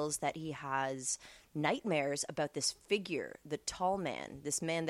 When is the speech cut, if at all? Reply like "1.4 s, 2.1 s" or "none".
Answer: none